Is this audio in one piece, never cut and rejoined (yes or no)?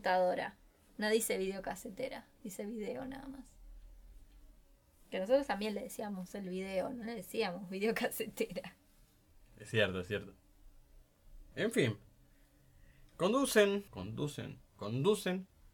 no